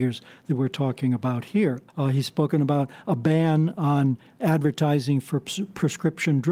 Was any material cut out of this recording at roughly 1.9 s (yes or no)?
yes